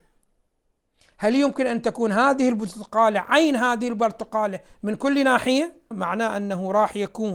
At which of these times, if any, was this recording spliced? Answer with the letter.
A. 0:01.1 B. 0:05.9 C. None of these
B